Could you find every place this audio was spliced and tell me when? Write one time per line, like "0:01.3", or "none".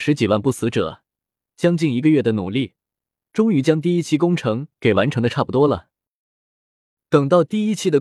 none